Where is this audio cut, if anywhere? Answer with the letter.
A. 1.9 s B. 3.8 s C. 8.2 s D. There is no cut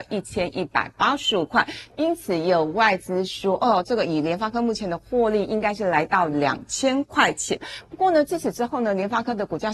D